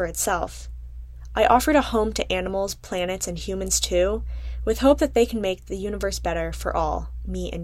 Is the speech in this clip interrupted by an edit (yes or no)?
no